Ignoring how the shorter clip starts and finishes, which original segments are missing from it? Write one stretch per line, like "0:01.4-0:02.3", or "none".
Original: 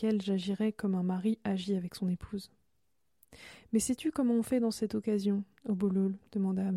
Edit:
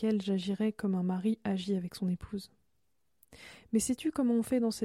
none